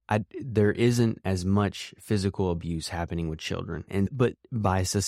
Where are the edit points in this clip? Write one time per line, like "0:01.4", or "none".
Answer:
0:03.9